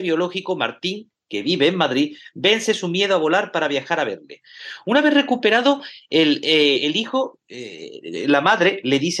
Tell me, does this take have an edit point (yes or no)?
no